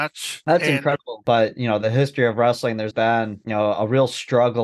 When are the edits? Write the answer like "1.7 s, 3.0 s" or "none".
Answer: 1.2 s, 2.9 s